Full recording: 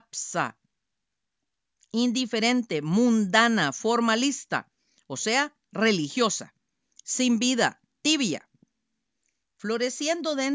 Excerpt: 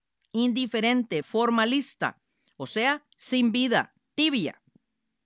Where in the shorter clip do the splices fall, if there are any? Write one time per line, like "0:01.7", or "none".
0:01.2
0:03.1